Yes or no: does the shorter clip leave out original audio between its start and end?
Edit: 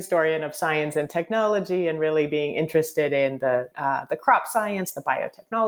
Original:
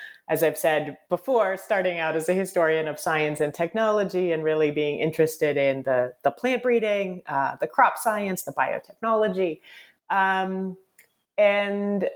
yes